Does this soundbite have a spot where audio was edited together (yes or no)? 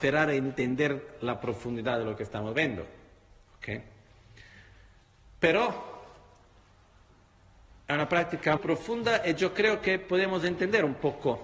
yes